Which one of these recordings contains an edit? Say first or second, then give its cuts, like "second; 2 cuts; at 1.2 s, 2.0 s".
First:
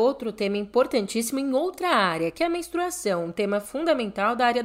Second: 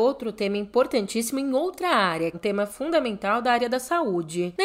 second; 1 cut; at 2.3 s